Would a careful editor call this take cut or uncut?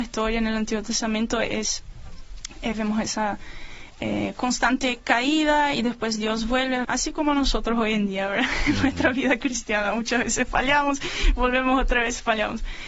cut